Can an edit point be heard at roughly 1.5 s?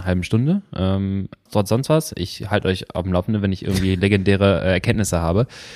yes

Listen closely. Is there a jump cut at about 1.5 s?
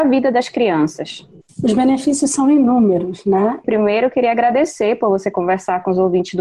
no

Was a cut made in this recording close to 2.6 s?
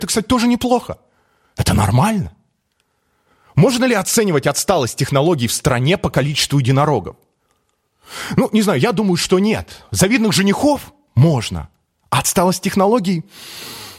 no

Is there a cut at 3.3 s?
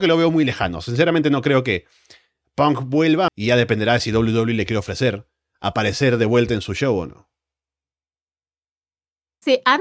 yes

